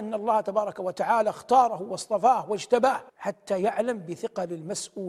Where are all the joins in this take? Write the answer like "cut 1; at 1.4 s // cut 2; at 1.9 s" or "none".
cut 1; at 3.1 s